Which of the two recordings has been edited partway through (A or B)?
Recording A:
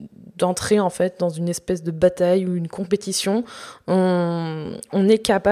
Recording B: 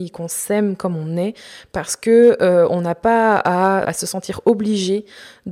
B